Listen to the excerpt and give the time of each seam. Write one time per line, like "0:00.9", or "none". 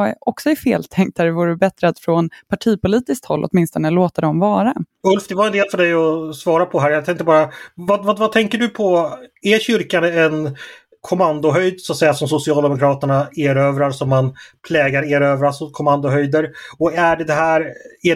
0:05.0